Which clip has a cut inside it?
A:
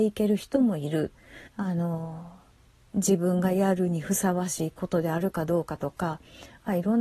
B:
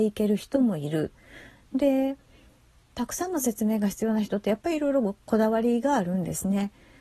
A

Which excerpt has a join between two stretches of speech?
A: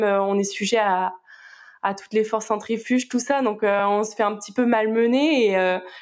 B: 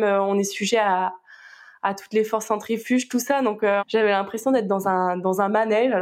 B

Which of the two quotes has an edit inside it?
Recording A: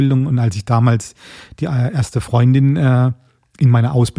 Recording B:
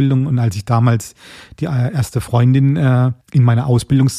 B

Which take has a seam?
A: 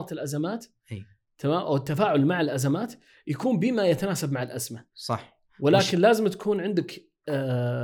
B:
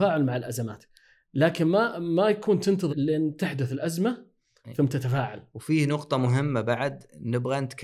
B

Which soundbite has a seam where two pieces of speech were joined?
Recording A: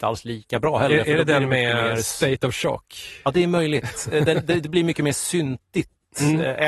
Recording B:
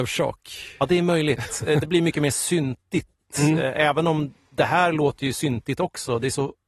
B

